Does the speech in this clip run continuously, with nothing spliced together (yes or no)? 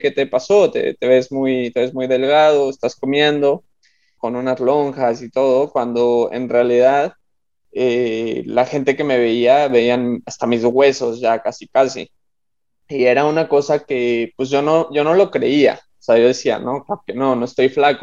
no